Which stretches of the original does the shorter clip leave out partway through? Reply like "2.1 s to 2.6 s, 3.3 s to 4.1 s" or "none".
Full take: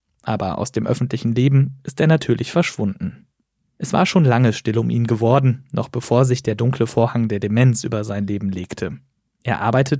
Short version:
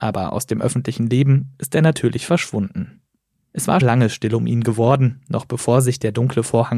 4.1 s to 4.2 s

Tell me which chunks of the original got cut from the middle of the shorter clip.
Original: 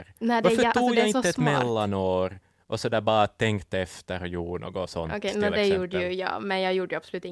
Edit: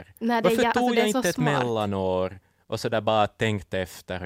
none

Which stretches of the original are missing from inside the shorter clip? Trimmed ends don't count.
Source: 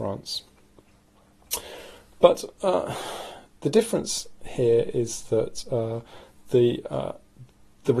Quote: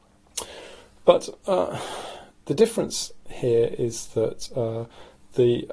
none

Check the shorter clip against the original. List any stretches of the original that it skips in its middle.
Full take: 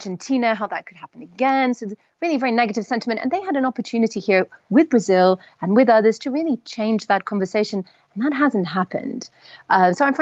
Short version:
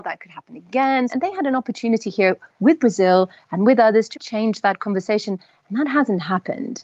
1.8 s to 3.2 s, 6.2 s to 6.6 s

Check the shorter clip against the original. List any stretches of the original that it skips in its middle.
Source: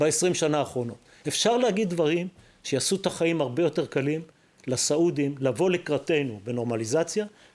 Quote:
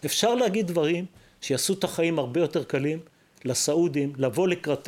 none

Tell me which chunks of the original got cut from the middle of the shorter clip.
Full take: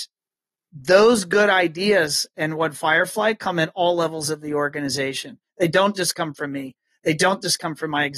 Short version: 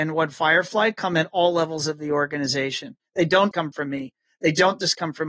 5.9 s to 6.1 s

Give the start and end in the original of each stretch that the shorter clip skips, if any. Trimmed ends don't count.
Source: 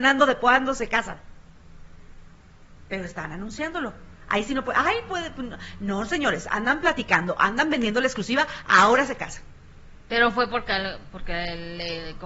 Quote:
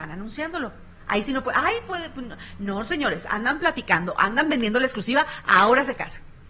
none

